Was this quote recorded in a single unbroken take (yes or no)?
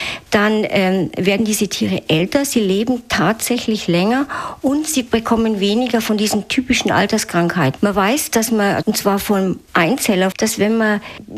no